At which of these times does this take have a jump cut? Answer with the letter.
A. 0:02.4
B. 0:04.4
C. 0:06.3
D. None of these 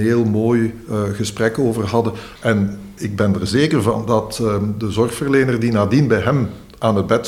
A